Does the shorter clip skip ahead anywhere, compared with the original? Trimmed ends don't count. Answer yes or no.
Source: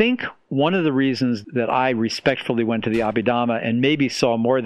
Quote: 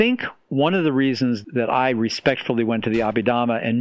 no